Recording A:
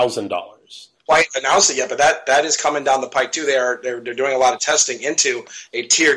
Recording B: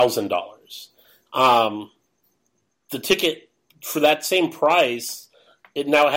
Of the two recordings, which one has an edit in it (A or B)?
A